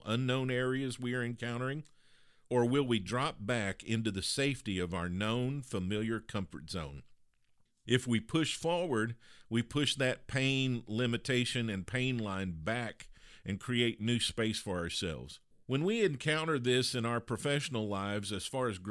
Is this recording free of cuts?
no; 1 cut; at 15.5 s

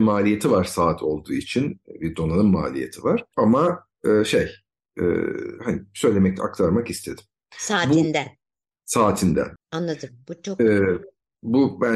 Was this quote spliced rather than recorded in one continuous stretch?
yes; 3 cuts; at 5.6 s, 7.5 s, 9.6 s

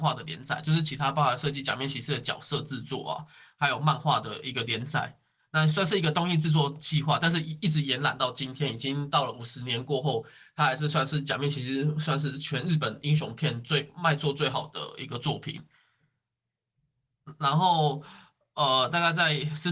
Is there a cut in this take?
no; 0 cuts

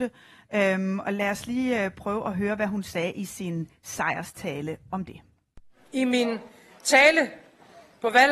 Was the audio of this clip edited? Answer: no; 0 cuts

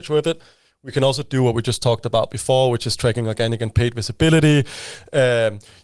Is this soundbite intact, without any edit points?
yes; 0 cuts

